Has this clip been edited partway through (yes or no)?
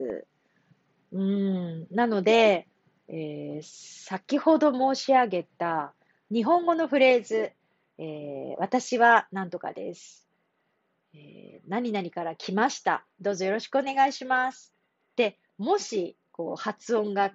no